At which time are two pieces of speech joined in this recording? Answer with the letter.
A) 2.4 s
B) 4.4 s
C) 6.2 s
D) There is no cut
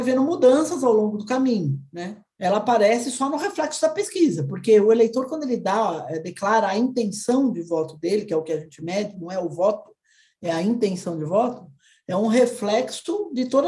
A